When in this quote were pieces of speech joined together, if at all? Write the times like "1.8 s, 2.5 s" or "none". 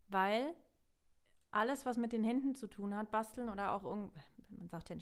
none